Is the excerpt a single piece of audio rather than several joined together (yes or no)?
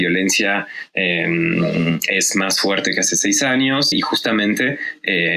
no